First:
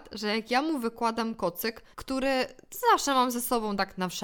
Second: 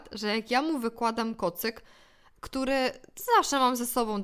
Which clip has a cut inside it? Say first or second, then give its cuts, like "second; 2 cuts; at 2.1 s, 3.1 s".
first; 1 cut; at 1.9 s